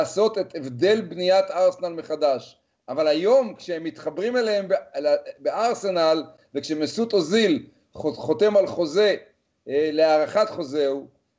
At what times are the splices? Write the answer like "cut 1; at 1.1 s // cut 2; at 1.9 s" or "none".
cut 1; at 2.8 s

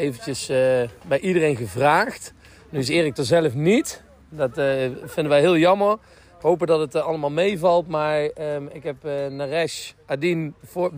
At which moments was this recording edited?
none

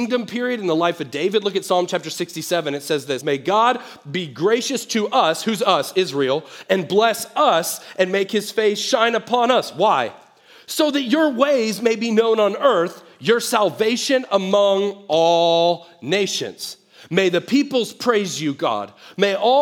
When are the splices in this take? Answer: cut 1; at 3.2 s

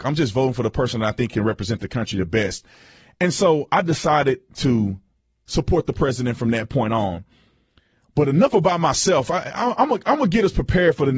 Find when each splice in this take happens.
none

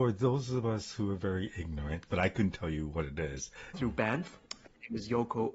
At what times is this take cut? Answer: cut 1; at 2.1 s // cut 2; at 3.7 s

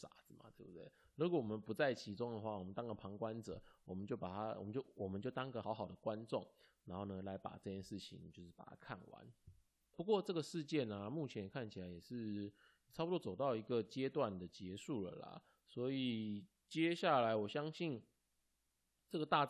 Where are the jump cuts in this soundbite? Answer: cut 1; at 5.6 s

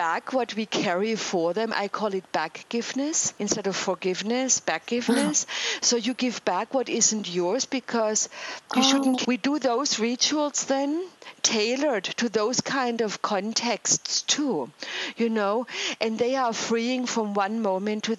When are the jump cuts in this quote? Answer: cut 1; at 9.2 s

